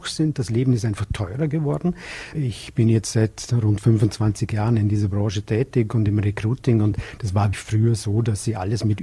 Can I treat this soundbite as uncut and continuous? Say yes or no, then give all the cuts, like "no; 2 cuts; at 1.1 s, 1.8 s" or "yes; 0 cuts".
no; 2 cuts; at 2.3 s, 7.5 s